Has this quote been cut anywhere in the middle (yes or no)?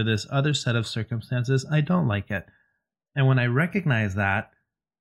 no